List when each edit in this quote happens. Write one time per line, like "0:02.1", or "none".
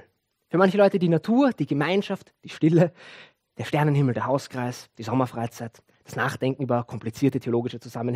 none